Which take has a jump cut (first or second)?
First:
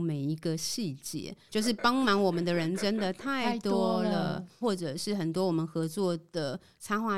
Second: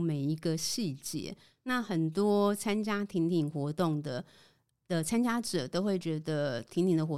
first